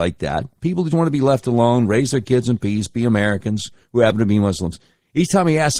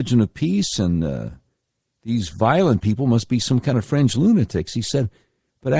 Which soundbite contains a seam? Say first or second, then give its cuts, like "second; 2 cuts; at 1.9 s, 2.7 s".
first; 1 cut; at 0.9 s